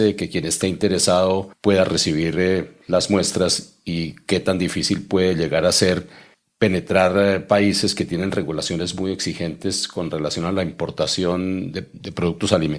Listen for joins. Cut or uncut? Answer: uncut